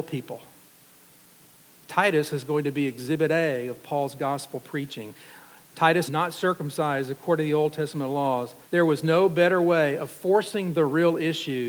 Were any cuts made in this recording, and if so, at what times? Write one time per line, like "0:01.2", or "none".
0:06.1
0:08.6